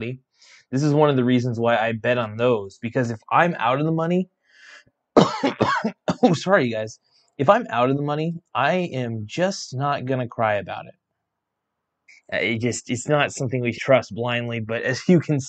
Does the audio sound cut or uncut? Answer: cut